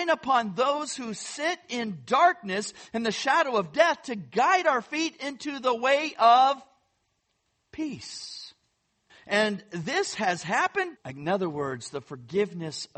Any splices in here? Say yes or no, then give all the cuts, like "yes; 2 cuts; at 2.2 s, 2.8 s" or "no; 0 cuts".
yes; 2 cuts; at 9.1 s, 11.0 s